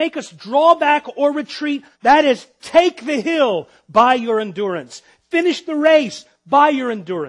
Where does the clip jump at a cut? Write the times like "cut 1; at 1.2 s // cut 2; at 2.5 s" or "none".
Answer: cut 1; at 1.9 s